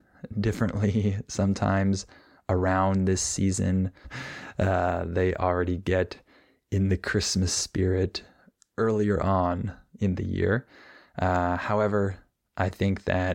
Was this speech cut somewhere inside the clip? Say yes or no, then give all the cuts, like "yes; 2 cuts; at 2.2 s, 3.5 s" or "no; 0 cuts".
yes; 1 cut; at 4.0 s